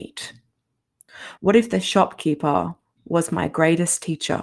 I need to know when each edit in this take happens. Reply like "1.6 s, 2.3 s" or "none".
1.4 s